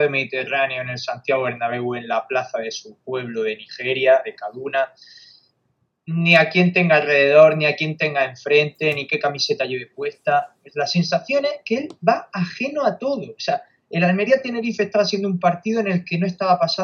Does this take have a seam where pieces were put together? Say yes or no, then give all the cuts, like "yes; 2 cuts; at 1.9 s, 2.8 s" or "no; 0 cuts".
no; 0 cuts